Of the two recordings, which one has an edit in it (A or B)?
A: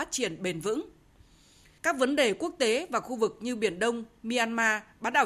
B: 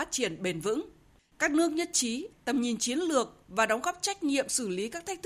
B